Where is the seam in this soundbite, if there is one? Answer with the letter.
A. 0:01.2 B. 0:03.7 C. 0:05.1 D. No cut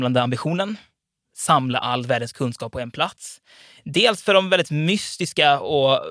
D